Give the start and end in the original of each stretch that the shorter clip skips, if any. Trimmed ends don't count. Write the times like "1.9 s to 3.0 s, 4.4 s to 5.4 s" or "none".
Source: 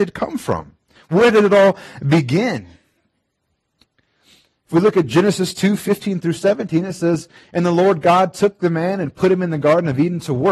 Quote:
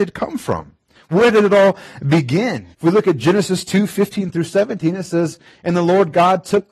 2.7 s to 4.6 s